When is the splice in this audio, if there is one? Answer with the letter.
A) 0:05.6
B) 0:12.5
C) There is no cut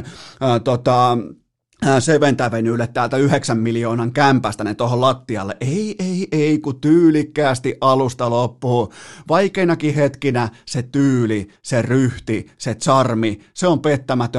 C